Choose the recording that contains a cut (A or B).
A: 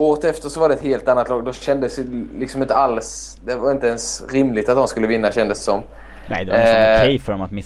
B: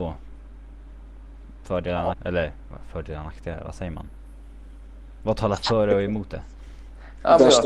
B